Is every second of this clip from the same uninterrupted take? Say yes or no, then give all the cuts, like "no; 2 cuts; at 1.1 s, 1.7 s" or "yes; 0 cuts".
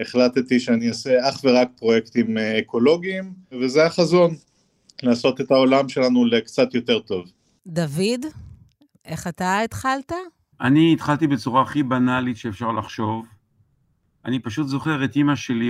yes; 0 cuts